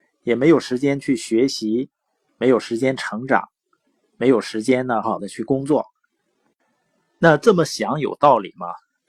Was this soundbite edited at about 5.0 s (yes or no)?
yes